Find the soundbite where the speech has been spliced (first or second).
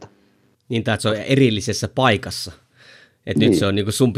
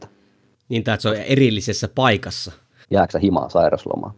second